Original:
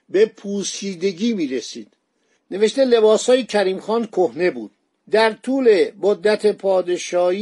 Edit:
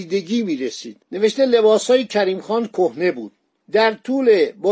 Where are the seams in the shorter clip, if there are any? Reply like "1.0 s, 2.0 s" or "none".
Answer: 1.0 s